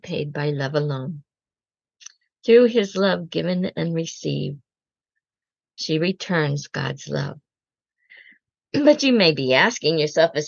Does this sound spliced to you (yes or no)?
no